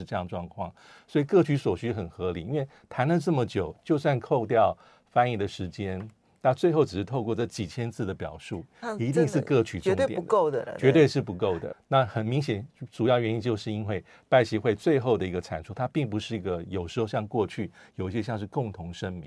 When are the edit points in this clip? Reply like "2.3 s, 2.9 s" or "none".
11.7 s